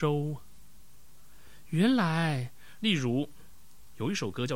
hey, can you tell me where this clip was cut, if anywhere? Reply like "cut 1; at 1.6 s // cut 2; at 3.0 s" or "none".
cut 1; at 2.8 s